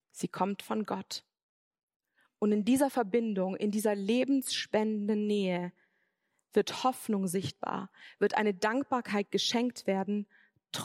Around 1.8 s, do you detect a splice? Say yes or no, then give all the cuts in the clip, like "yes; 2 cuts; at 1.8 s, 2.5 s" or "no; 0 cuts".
no; 0 cuts